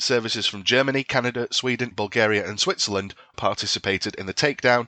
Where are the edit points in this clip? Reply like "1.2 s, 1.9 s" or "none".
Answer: 1.9 s, 3.3 s